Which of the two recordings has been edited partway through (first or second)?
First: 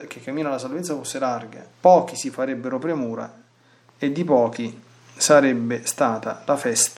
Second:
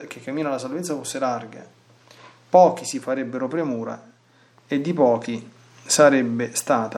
first